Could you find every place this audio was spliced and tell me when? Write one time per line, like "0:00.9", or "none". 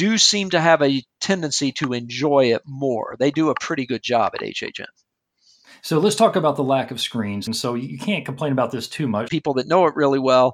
0:07.5
0:09.3